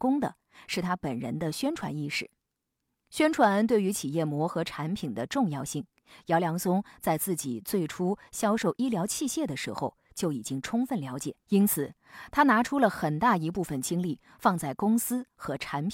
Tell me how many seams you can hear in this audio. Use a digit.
2